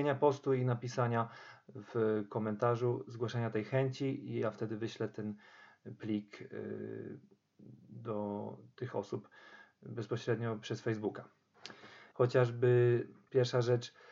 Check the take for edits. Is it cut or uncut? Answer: cut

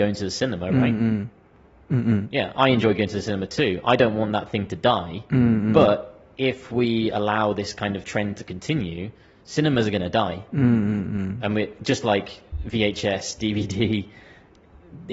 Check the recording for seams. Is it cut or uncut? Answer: uncut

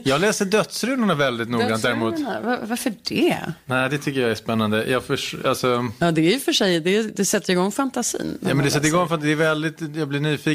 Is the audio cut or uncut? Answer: uncut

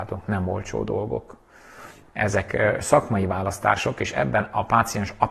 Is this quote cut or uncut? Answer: cut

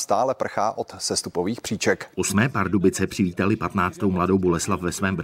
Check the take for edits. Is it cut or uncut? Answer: cut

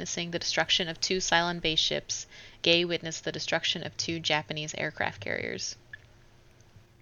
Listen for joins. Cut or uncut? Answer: uncut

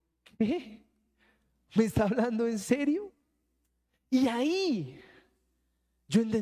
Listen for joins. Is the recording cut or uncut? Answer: uncut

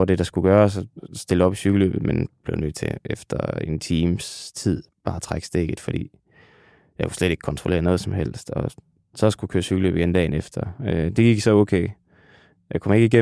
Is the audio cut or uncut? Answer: uncut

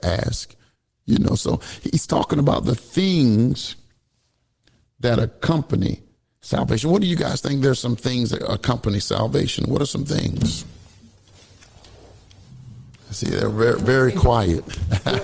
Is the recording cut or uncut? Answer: uncut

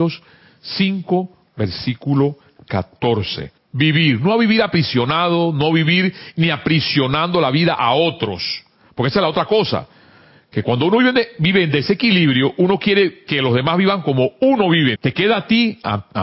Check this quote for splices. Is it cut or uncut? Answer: cut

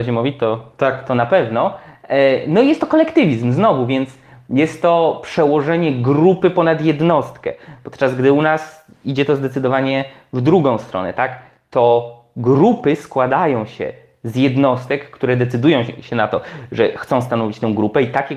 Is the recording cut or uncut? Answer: uncut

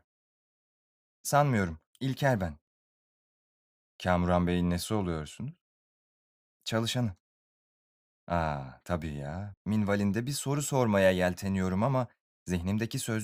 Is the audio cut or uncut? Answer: cut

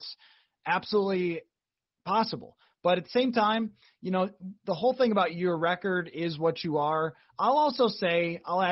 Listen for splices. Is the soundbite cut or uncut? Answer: uncut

